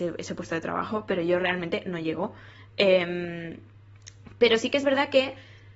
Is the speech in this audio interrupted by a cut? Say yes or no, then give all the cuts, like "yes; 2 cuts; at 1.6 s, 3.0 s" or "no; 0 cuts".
no; 0 cuts